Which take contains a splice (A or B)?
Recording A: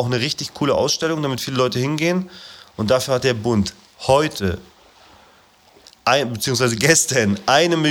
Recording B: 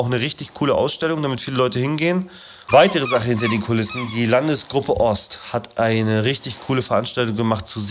B